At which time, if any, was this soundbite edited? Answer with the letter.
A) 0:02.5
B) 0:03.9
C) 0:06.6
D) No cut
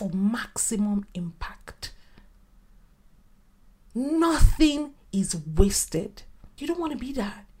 C